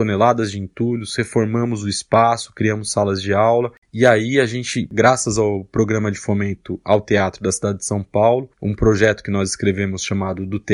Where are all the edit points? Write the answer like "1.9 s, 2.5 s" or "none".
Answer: 3.8 s, 8.5 s

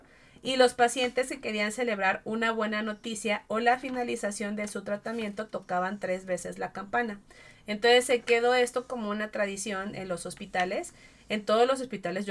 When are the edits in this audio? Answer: none

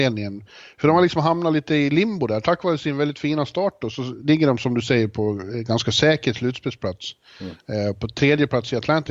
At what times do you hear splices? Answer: none

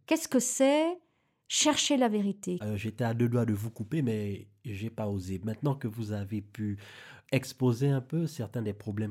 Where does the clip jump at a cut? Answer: 2.6 s, 7.3 s

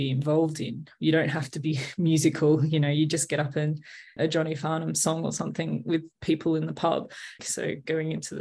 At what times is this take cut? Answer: 4.2 s, 7.4 s

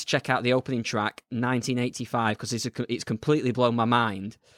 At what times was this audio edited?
none

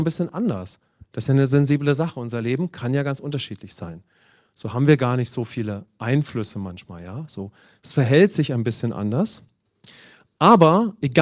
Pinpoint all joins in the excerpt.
none

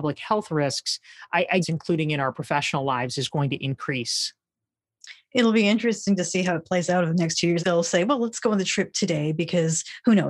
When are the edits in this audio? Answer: 1.6 s, 7.6 s

